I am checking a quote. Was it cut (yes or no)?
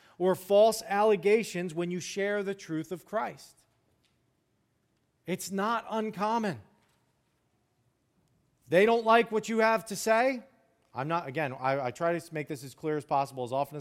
no